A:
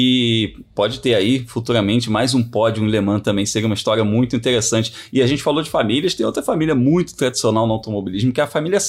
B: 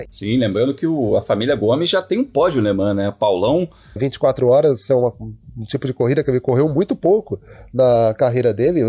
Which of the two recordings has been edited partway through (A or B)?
B